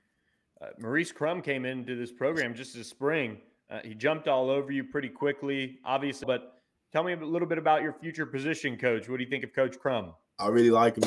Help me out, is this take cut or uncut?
cut